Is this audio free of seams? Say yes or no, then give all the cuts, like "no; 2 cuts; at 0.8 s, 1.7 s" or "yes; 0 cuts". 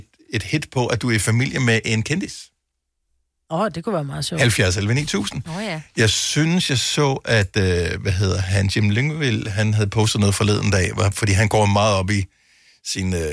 yes; 0 cuts